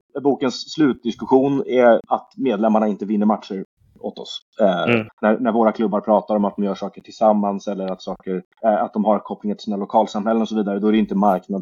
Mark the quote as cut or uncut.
cut